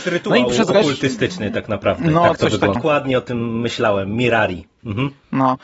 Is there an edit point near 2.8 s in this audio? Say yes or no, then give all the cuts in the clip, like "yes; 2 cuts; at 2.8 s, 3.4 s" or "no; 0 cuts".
yes; 1 cut; at 2.8 s